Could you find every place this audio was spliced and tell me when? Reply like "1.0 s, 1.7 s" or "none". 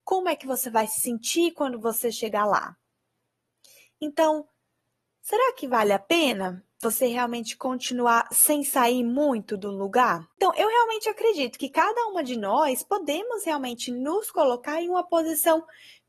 none